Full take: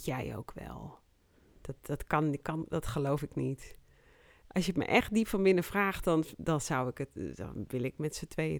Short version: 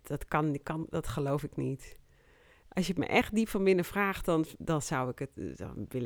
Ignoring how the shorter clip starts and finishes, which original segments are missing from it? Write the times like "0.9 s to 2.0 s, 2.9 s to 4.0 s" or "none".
none